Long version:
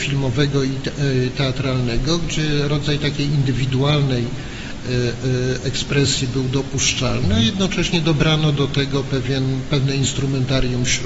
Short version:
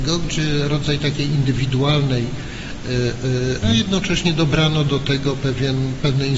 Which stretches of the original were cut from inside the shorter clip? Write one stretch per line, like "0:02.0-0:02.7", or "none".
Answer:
0:05.6-0:07.3